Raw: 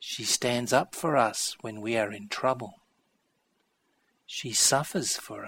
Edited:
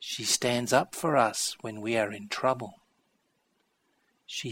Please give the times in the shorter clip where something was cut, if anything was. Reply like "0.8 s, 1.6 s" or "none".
none